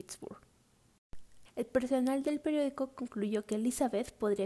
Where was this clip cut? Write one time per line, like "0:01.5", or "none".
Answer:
0:01.4